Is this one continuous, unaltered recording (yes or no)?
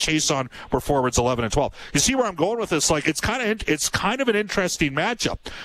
no